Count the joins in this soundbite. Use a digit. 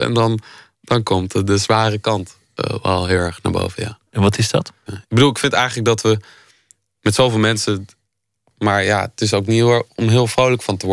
2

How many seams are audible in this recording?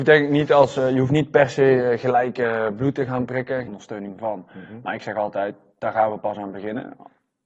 1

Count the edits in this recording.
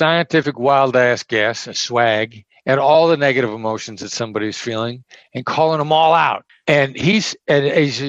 1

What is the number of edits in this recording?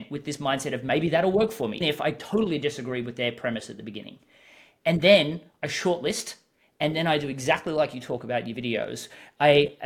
1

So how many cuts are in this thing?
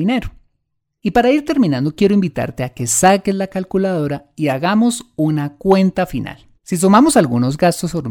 2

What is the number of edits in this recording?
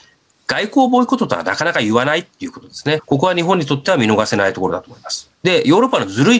2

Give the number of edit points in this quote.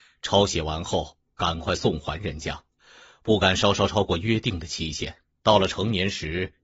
1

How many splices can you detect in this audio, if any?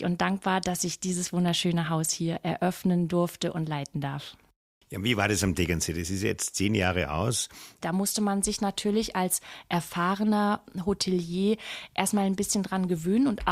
1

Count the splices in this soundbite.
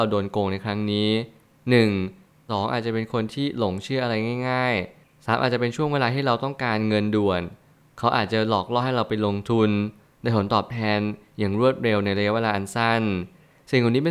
1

